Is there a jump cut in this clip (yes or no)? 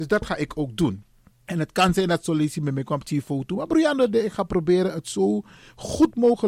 no